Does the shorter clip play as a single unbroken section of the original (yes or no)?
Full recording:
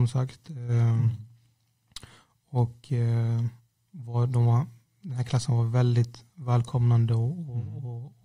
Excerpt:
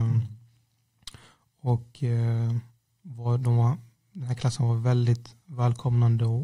yes